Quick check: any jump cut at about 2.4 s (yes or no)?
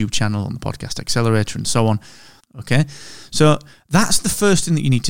yes